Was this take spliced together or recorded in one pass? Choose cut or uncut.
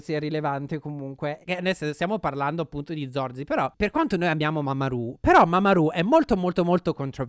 cut